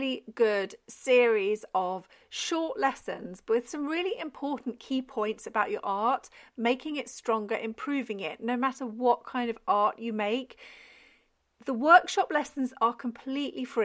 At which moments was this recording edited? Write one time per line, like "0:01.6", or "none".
none